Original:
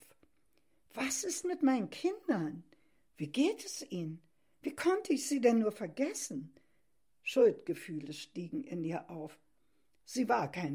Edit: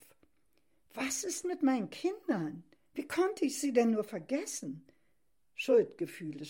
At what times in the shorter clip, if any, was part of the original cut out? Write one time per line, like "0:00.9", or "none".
0:02.8